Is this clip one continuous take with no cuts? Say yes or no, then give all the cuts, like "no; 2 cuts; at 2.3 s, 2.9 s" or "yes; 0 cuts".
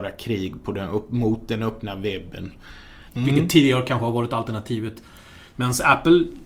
no; 2 cuts; at 3.1 s, 5.5 s